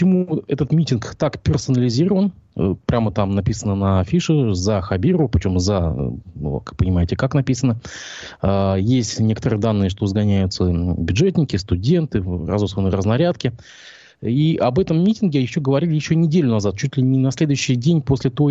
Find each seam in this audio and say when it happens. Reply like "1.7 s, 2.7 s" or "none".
none